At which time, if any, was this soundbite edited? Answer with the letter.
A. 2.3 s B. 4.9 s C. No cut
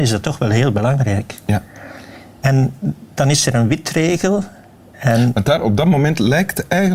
C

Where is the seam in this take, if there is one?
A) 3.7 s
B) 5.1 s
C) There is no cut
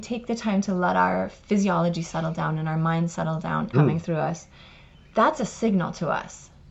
A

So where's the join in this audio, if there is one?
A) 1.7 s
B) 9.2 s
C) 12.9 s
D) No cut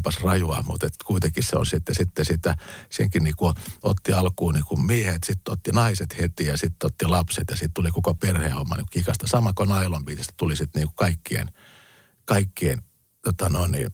D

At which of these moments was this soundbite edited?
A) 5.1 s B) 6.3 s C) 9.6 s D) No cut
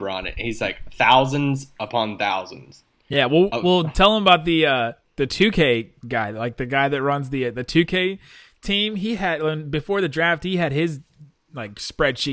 A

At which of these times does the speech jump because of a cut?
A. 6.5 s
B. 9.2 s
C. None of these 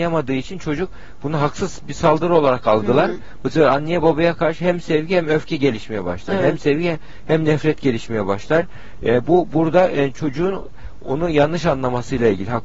C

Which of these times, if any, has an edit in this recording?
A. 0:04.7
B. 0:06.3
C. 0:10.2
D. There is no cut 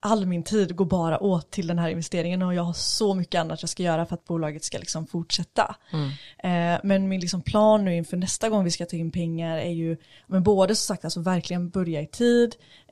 D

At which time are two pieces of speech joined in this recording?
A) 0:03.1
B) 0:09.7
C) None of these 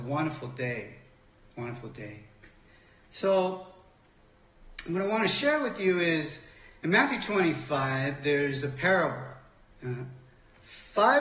B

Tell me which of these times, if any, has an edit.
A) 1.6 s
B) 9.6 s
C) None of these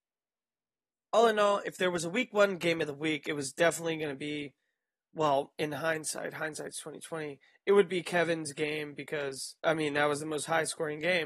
B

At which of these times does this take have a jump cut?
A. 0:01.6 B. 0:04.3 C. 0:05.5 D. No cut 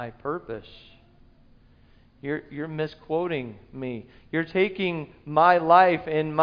D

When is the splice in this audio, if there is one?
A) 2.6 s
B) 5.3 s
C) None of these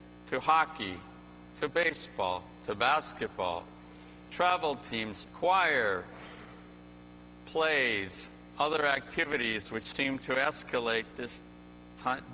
B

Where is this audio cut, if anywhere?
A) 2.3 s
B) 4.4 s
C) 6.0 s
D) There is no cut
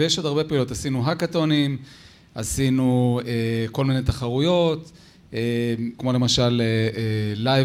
C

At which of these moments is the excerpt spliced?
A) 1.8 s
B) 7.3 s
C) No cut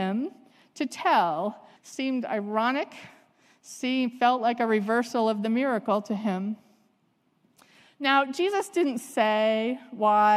A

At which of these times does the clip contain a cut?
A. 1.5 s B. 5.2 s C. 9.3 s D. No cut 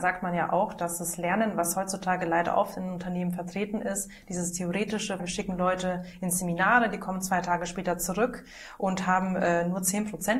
B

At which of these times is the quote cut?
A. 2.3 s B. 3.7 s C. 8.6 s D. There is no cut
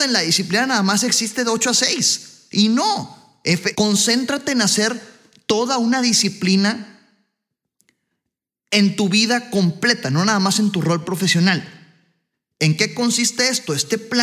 B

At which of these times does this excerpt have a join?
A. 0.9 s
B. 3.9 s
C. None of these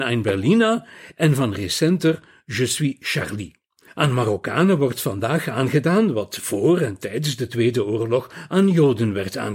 B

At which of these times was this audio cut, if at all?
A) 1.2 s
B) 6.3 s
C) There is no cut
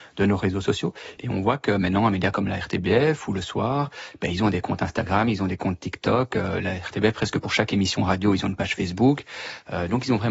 A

